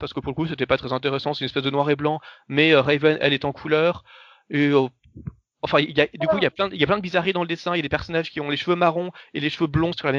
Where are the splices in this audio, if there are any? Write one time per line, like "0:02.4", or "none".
none